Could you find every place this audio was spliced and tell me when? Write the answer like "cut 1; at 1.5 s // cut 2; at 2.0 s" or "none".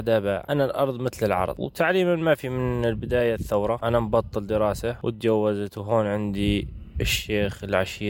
cut 1; at 3.8 s

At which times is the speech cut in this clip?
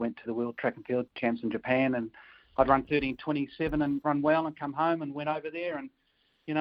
cut 1; at 1.1 s // cut 2; at 4.0 s

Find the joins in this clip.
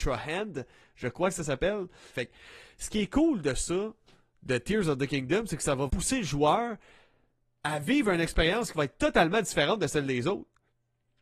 cut 1; at 2.1 s // cut 2; at 5.9 s

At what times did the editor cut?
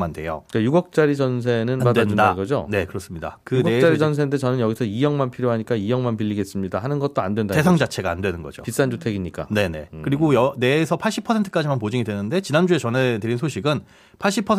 cut 1; at 1.8 s

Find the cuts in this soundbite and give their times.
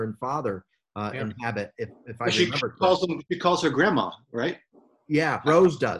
none

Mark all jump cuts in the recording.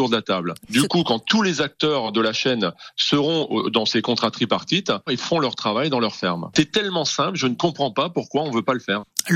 cut 1; at 5.1 s

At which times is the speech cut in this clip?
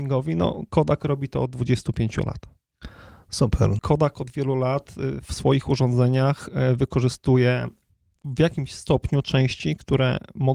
cut 1; at 3.8 s

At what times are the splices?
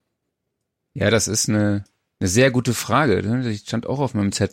none

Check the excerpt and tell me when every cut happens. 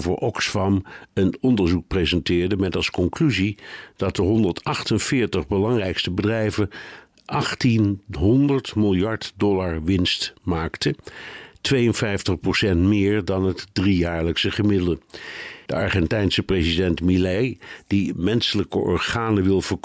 cut 1; at 15.7 s

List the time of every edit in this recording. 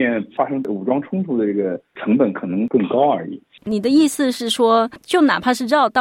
cut 1; at 3.6 s

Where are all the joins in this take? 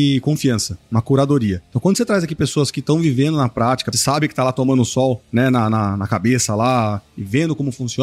cut 1; at 3.9 s

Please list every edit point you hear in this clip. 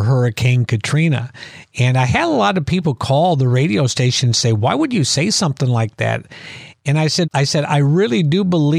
cut 1; at 7.2 s

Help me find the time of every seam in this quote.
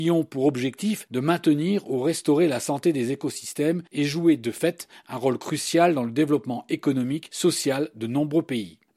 none

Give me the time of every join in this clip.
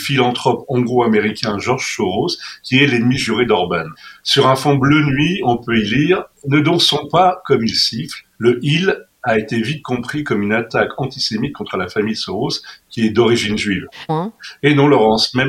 cut 1; at 14.1 s

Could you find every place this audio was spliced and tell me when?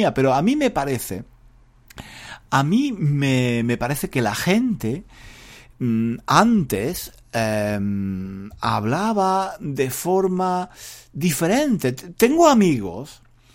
none

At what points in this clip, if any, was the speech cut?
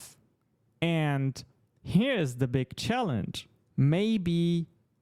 cut 1; at 3.7 s

